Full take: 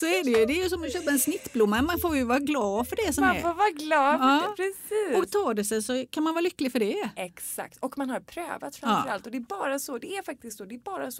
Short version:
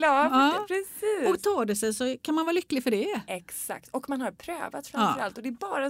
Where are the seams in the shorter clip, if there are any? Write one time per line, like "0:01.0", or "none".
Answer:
none